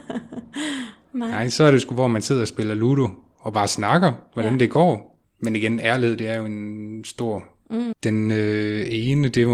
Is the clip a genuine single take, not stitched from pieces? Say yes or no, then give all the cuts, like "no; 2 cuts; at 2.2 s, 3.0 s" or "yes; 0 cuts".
no; 2 cuts; at 5.2 s, 7.9 s